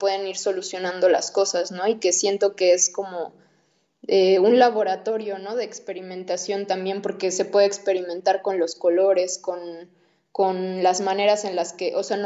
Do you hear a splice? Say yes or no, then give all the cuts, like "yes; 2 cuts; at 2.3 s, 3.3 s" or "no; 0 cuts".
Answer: no; 0 cuts